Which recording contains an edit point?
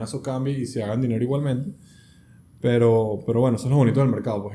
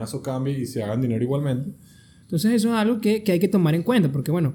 second; 1 cut; at 2.2 s

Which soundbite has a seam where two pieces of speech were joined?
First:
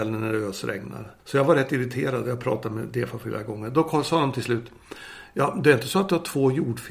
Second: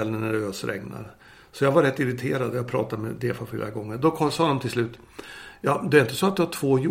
first; 1 cut; at 1.2 s

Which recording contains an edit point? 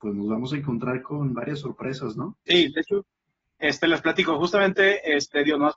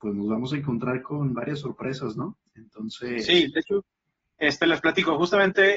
first; 1 cut; at 2.5 s

